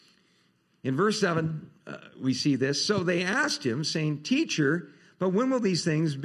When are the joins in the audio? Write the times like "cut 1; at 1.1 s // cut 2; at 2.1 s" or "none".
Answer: none

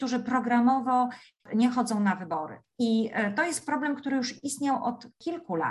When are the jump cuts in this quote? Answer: none

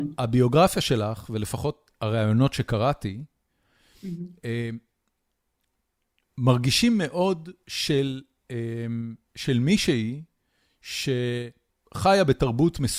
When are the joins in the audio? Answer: cut 1; at 9.2 s

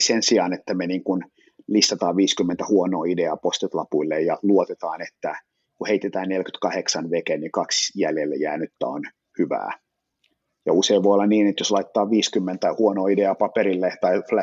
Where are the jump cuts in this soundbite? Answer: none

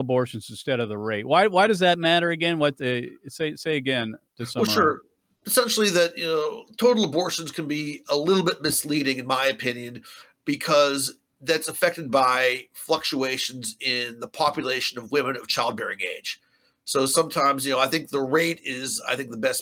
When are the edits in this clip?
none

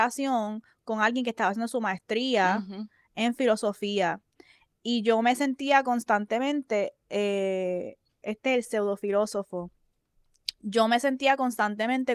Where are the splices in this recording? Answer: none

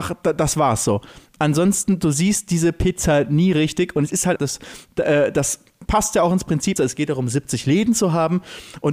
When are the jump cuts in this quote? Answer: cut 1; at 4.4 s // cut 2; at 6.8 s

